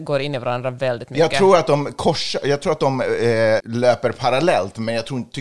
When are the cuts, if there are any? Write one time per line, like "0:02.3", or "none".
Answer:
0:03.6